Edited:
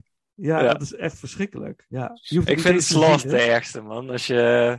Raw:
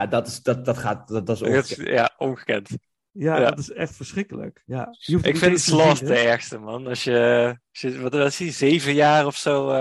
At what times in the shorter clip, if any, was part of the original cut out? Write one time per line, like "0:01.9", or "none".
none